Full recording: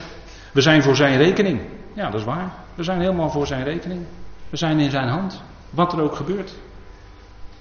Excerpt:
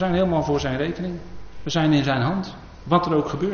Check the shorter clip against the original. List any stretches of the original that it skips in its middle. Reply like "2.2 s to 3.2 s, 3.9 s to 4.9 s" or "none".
none